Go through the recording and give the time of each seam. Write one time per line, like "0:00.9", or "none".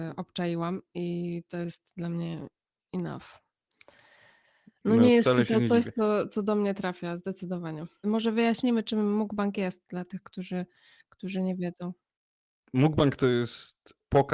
0:08.0

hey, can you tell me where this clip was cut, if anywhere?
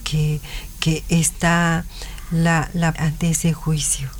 0:02.9

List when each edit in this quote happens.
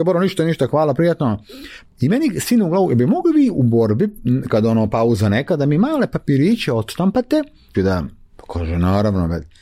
0:01.8
0:04.5
0:07.7

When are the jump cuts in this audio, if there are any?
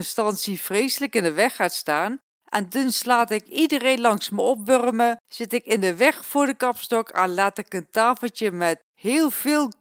0:02.4
0:05.2

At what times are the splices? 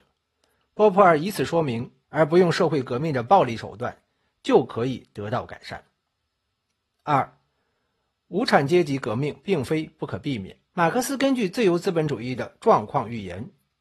0:02.0
0:10.7

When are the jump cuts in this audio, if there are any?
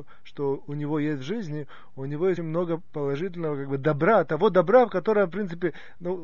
0:02.4

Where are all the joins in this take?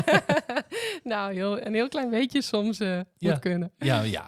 none

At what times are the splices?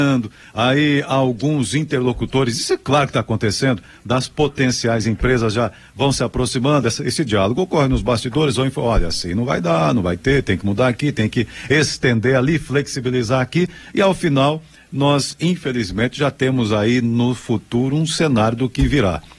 none

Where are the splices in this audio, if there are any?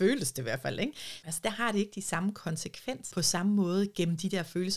0:01.2
0:03.1

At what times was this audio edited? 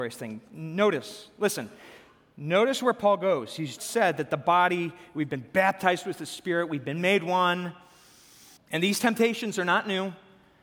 0:03.8
0:08.6

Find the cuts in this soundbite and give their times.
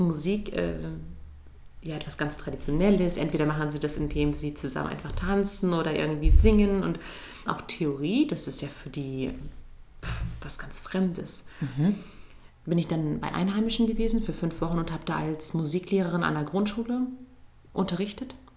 0:07.5
0:12.5

